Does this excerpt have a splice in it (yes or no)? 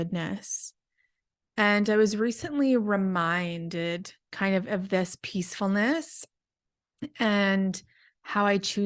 no